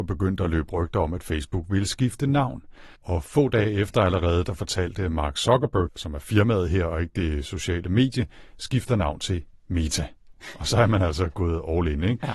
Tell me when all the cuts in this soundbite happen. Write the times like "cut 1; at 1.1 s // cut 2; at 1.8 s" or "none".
cut 1; at 3.0 s // cut 2; at 5.9 s